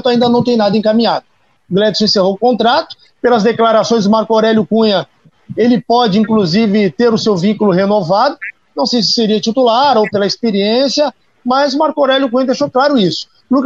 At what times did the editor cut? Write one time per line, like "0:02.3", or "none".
0:01.6

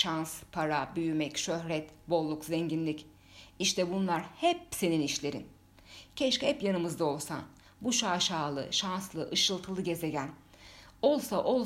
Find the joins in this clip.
none

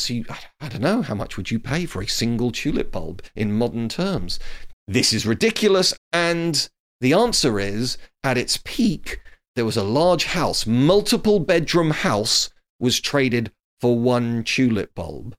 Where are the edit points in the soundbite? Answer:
0:04.7
0:06.0

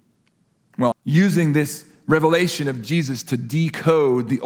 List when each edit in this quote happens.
0:00.9

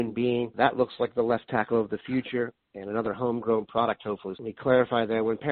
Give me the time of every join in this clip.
0:04.3

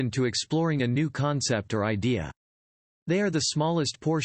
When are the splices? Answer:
none

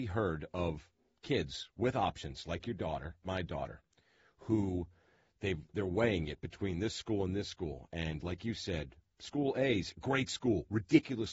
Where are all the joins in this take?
0:03.2

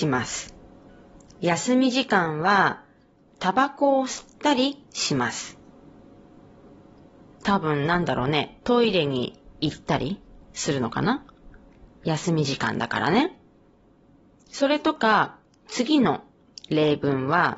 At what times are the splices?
0:03.3
0:07.4

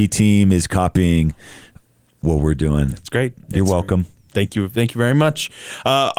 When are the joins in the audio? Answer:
none

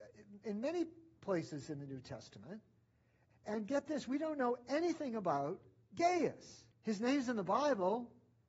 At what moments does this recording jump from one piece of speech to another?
0:03.3
0:06.7

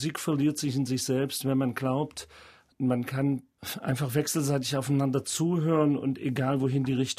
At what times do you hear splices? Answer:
none

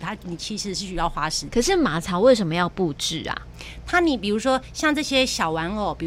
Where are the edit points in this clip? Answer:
0:01.5

